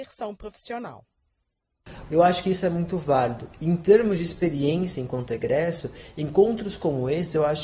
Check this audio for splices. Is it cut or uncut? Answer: cut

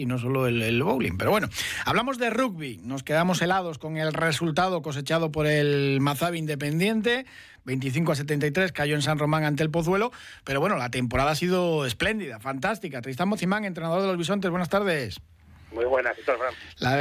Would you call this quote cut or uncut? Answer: uncut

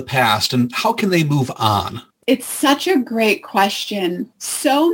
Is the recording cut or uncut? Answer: uncut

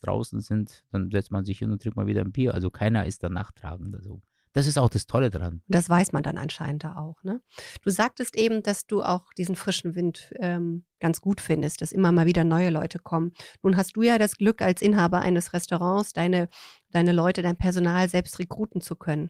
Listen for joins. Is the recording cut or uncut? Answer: uncut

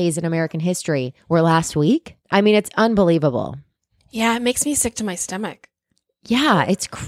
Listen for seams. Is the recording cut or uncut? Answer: cut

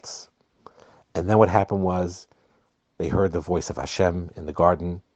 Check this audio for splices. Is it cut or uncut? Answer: uncut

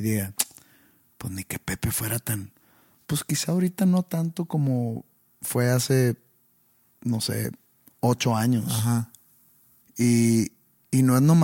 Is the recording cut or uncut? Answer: cut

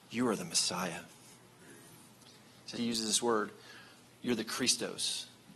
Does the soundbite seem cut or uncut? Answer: cut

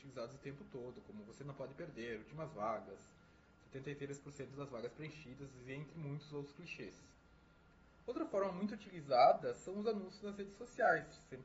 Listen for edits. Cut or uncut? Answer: uncut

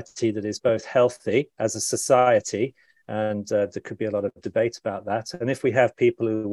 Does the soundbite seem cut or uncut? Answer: uncut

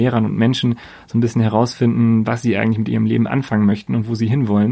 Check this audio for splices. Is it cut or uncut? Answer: uncut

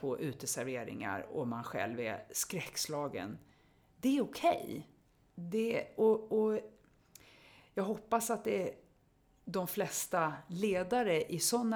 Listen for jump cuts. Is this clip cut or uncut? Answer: uncut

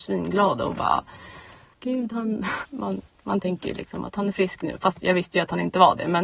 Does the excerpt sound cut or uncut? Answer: cut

